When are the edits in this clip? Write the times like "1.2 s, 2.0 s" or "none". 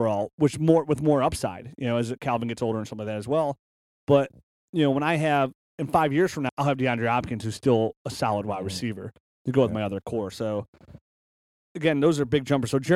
6.5 s